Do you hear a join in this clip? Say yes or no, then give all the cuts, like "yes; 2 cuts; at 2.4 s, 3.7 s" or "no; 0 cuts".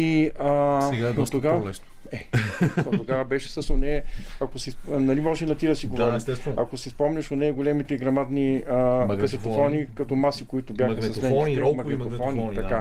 no; 0 cuts